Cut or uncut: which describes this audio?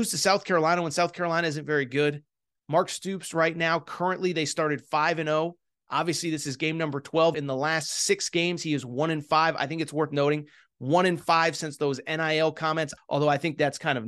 cut